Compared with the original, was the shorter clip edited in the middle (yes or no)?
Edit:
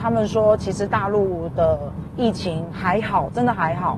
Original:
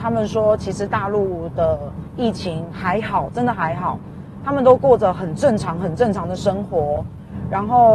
no